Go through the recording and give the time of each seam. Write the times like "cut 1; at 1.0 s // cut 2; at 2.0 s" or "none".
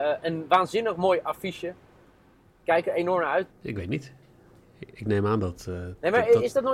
cut 1; at 3.5 s